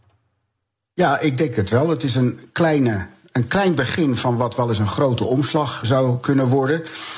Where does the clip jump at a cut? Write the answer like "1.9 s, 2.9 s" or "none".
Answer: 5.8 s